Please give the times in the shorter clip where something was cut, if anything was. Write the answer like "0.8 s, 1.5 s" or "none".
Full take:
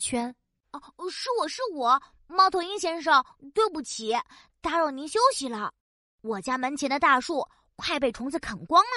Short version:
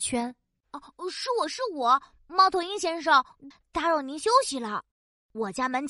3.5 s